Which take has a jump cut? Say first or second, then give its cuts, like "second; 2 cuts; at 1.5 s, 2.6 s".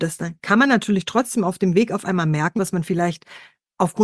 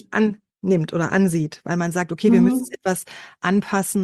first; 1 cut; at 2.6 s